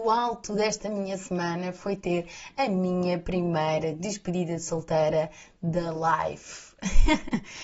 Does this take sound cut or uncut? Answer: uncut